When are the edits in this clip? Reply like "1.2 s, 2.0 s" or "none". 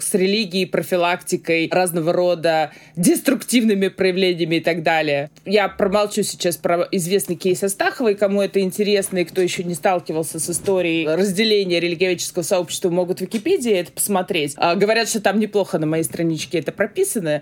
none

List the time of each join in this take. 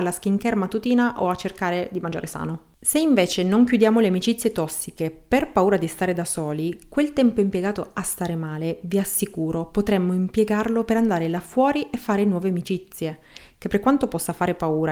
none

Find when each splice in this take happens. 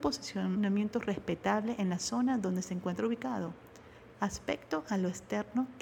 4.1 s

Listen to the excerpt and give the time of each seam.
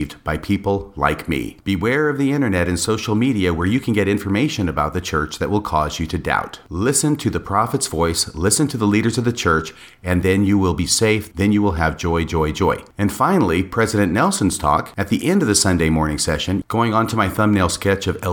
11.3 s, 16.6 s

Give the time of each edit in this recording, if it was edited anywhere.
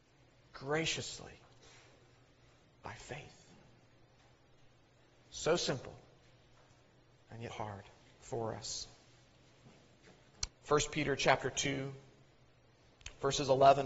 7.5 s, 10.5 s

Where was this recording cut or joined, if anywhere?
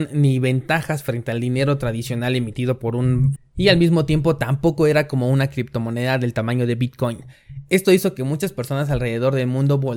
3.4 s

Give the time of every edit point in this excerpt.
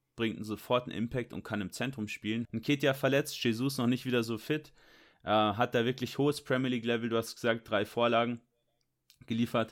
2.4 s, 5.1 s

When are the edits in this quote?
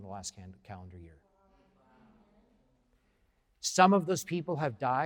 none

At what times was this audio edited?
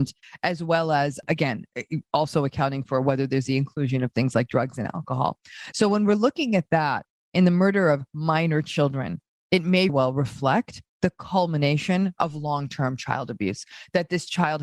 5.7 s, 9.9 s

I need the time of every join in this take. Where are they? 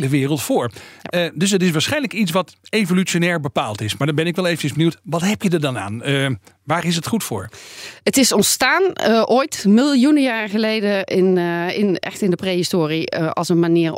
none

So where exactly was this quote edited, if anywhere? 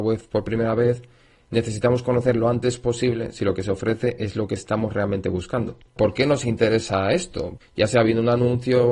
6.0 s, 7.6 s

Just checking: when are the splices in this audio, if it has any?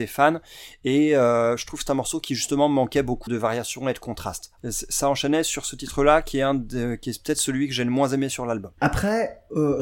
3.3 s, 4.6 s

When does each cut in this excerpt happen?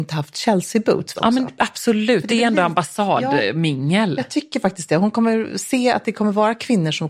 1.1 s

